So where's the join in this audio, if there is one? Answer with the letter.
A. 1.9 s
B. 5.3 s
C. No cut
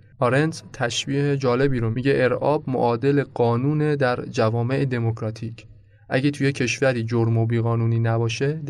A